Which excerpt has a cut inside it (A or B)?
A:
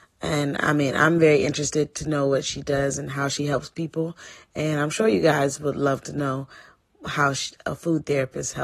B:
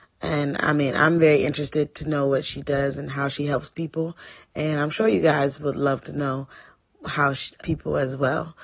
B